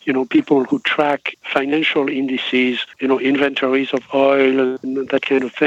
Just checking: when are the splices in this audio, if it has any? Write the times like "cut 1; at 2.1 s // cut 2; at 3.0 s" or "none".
cut 1; at 1.3 s // cut 2; at 2.9 s